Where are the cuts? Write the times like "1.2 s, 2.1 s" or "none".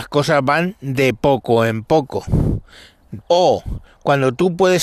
3.2 s